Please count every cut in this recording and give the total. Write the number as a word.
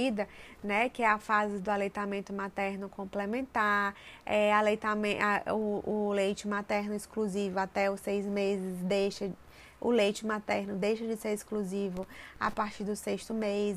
zero